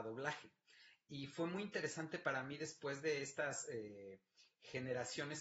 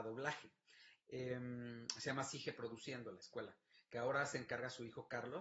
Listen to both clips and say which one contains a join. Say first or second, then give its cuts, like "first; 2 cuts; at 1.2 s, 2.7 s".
second; 1 cut; at 1.0 s